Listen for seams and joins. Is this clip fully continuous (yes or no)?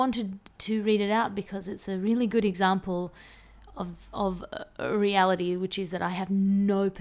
yes